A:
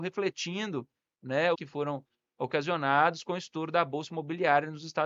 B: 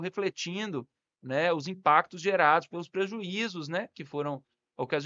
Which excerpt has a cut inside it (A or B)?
A